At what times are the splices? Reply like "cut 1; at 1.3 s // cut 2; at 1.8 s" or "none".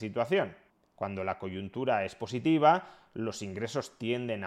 cut 1; at 1.0 s

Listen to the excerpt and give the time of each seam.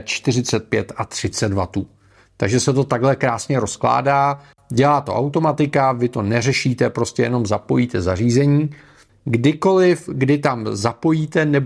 cut 1; at 9.1 s

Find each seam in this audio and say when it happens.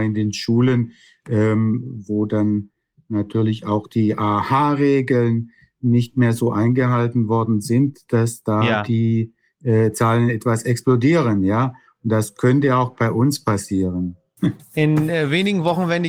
cut 1; at 14.4 s

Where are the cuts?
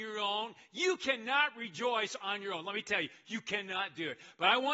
cut 1; at 2.2 s

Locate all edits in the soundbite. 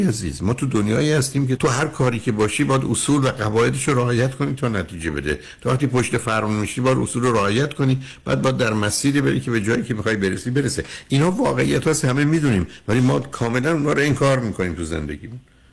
cut 1; at 1.6 s

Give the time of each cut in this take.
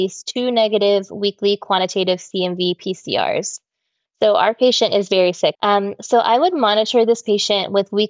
cut 1; at 4.1 s // cut 2; at 5.6 s

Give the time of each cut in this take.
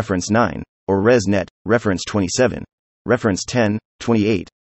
cut 1; at 2.9 s

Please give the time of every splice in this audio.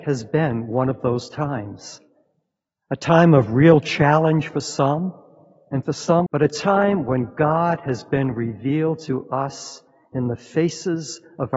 cut 1; at 6.3 s

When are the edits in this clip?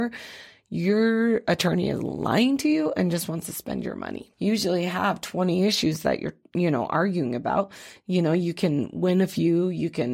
cut 1; at 4.3 s

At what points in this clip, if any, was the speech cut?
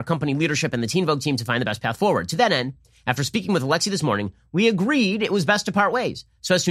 none

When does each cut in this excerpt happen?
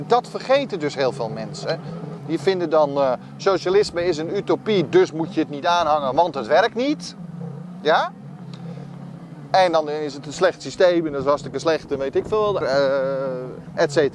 cut 1; at 12.6 s

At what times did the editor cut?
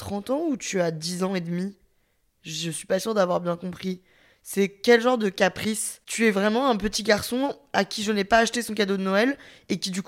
none

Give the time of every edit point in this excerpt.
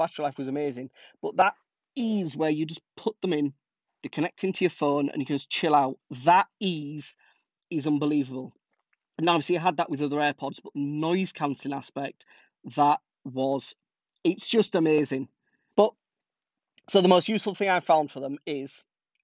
cut 1; at 15.7 s

